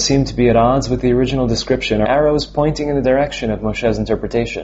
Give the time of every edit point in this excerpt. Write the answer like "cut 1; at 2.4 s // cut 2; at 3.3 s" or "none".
cut 1; at 2.0 s

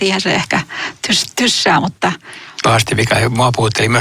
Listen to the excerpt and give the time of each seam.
cut 1; at 2.6 s

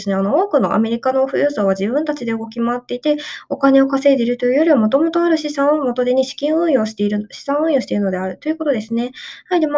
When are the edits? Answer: none

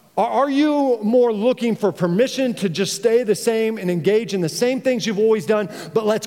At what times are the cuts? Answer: none

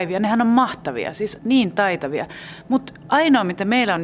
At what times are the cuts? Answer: cut 1; at 1.4 s

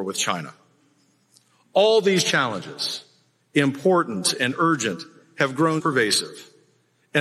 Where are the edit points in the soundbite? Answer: cut 1; at 5.8 s

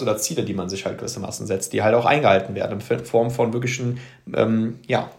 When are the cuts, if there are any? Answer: none

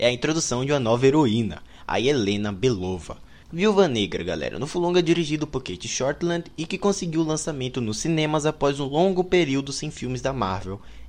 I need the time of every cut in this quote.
cut 1; at 3.4 s

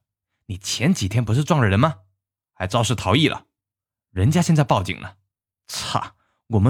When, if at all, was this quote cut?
none

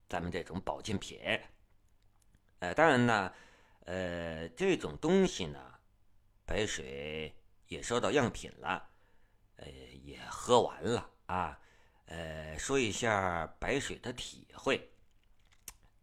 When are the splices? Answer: none

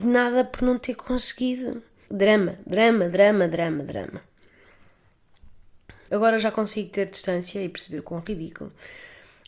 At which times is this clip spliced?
cut 1; at 2.1 s // cut 2; at 6.1 s

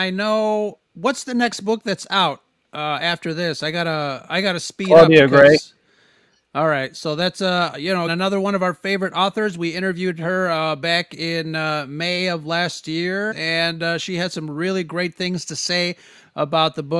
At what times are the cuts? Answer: cut 1; at 8.1 s // cut 2; at 13.3 s

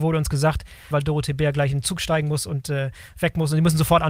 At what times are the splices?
cut 1; at 0.9 s

